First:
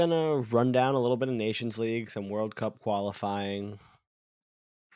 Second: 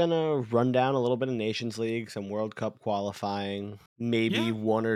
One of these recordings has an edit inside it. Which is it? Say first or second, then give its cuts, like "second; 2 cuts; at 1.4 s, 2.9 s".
second; 1 cut; at 3.9 s